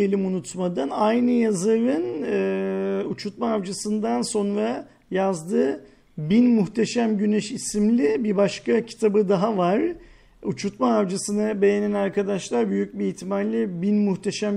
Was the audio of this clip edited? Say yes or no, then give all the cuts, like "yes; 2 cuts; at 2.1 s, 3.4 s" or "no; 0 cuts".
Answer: no; 0 cuts